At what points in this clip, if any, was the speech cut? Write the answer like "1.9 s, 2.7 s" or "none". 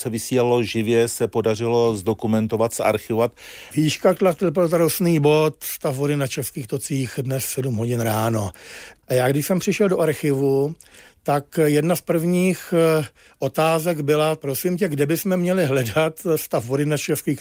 3.7 s

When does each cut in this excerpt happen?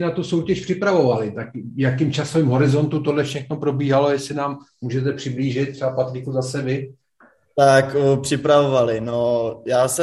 none

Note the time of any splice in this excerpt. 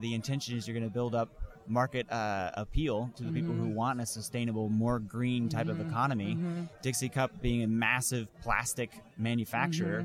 none

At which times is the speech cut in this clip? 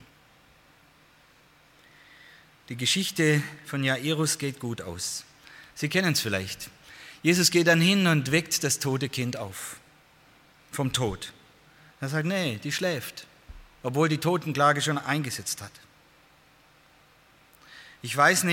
none

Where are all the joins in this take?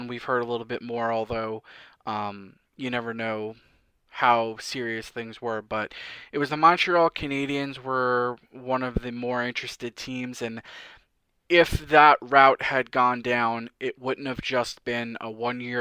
none

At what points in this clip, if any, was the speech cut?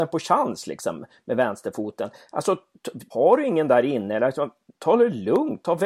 3.1 s

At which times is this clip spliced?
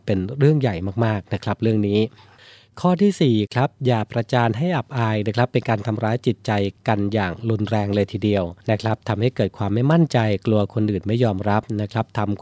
8.6 s

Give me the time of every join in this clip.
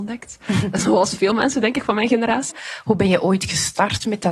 2.5 s

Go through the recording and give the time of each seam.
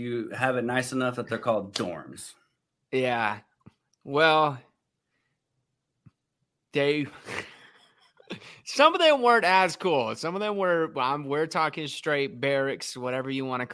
none

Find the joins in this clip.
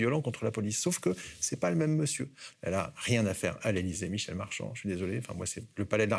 2.5 s

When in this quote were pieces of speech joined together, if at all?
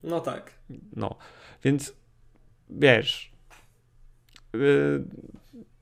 0.9 s

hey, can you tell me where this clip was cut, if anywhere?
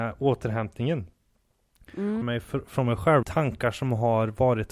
2.2 s, 3.2 s

